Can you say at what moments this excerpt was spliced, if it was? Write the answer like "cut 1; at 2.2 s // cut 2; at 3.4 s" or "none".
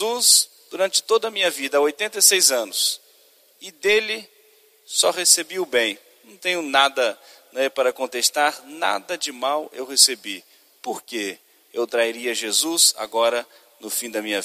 none

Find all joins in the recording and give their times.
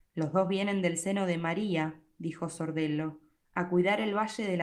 none

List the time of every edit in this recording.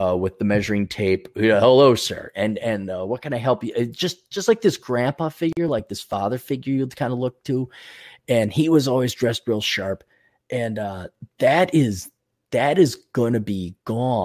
none

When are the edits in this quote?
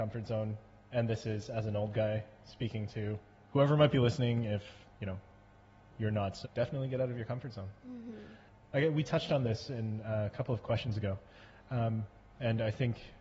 cut 1; at 6.4 s

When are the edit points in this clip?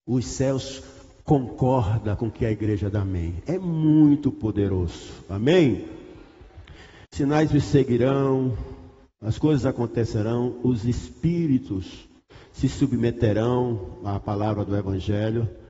cut 1; at 7.0 s

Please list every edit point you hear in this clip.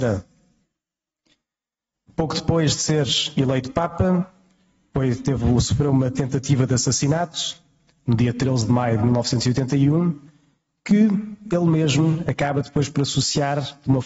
none

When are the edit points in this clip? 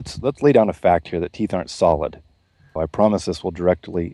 cut 1; at 2.8 s

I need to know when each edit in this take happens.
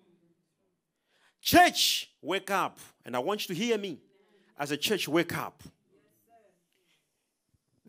none

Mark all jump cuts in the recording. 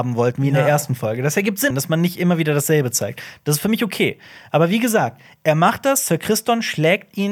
cut 1; at 1.7 s

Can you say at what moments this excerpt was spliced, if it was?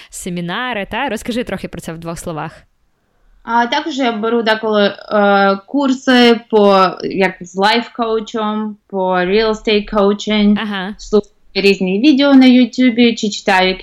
none

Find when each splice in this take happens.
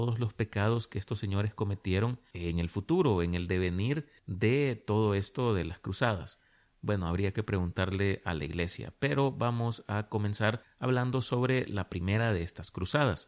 none

